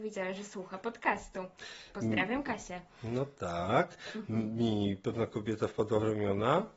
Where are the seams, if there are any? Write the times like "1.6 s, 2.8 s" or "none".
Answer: none